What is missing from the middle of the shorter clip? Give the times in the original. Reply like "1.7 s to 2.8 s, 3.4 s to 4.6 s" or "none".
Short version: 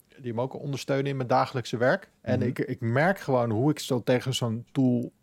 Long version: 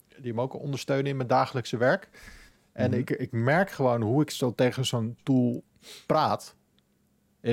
2.1 s to 2.6 s